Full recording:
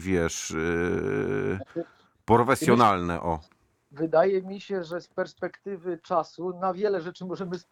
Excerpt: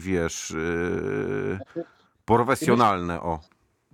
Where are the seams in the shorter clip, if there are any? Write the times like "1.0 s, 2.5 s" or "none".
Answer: none